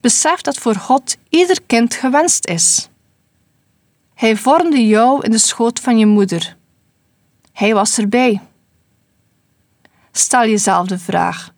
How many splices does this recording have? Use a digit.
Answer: 1